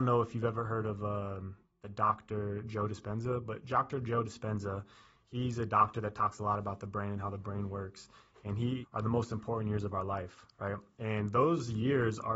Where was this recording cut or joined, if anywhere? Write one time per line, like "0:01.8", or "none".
0:08.8